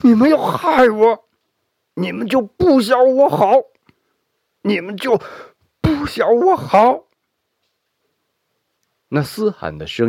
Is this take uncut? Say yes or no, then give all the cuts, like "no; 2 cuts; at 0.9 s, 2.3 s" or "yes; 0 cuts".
yes; 0 cuts